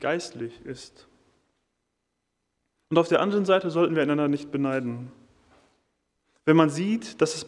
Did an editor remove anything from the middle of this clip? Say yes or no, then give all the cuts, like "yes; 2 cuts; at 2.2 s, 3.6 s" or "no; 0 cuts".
no; 0 cuts